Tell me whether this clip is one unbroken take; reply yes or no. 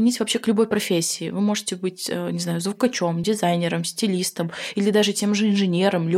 yes